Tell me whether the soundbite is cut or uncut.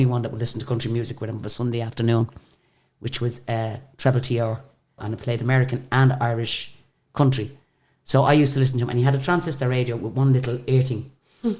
cut